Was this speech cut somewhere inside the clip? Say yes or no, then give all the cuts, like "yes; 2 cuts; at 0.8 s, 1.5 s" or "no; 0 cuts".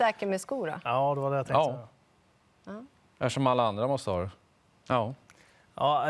yes; 1 cut; at 4.7 s